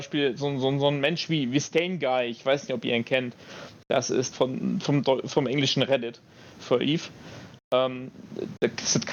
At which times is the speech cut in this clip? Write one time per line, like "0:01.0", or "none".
0:04.3

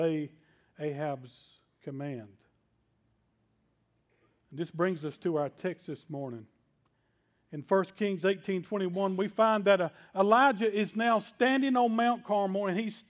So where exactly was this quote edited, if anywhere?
none

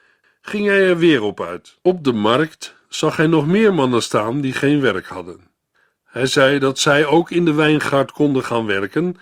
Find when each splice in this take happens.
0:01.8

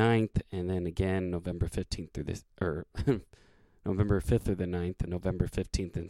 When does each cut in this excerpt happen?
0:05.1

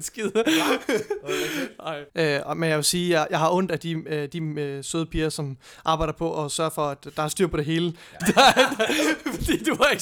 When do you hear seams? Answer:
0:02.1
0:08.2

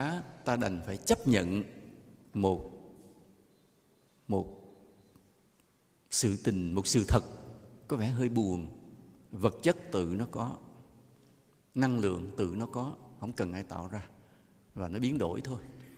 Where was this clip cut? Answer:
none

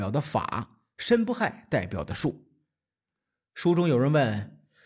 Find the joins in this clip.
none

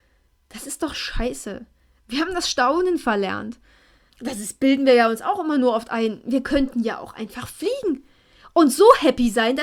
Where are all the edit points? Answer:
0:04.1

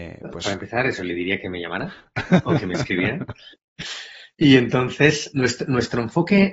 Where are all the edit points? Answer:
0:03.5
0:05.3

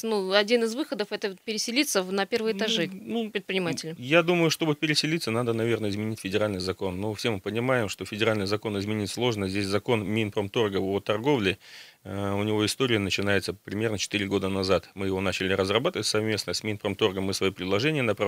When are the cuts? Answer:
none

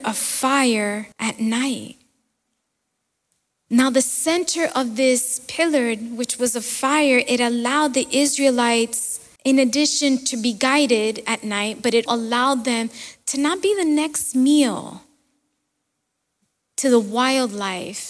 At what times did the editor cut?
0:01.1
0:09.4
0:12.1

